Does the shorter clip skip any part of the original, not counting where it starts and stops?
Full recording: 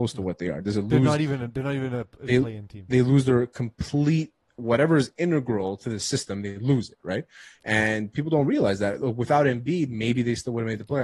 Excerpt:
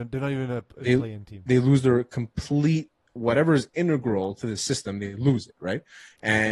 no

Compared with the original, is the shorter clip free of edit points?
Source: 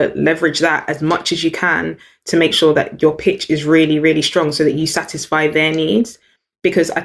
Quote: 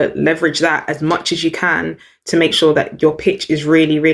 yes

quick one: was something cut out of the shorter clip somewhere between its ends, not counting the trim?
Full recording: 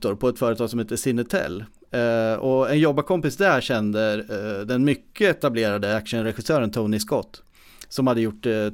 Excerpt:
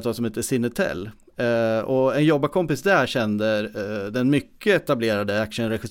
no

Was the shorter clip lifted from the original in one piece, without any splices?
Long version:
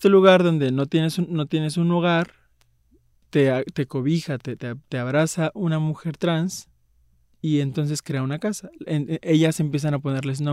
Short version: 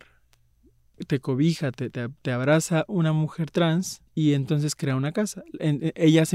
no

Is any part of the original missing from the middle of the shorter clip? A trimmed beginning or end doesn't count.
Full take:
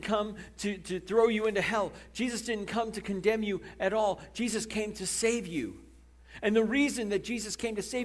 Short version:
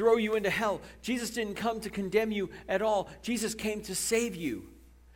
no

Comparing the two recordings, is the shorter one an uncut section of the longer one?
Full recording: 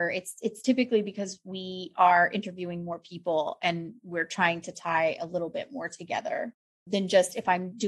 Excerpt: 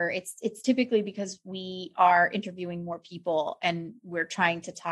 yes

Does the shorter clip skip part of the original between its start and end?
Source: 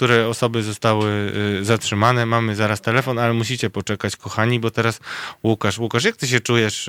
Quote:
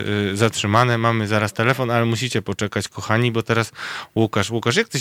no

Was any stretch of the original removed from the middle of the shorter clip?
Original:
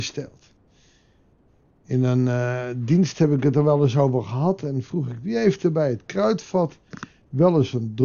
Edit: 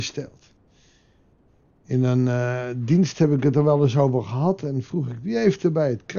no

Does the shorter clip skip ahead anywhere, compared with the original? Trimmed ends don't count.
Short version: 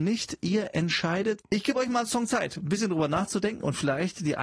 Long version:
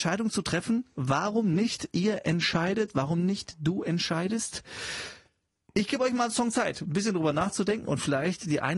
yes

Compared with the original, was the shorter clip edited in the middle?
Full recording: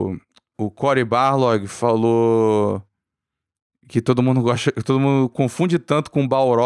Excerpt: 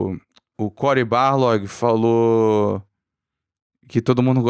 no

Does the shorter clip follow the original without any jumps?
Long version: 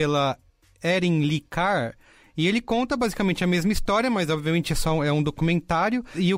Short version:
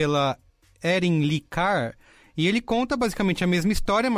yes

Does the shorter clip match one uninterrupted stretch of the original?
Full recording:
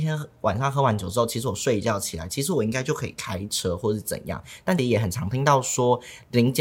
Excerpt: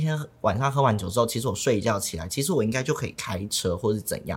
yes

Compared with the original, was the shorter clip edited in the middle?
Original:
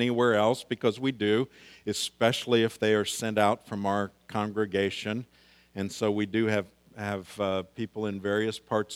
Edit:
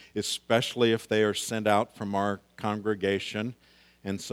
no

